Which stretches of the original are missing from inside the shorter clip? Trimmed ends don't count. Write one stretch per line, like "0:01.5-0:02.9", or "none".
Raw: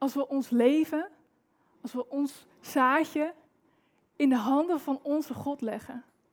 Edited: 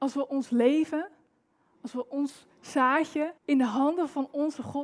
0:03.4-0:04.1